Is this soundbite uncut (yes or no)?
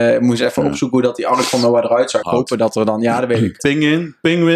no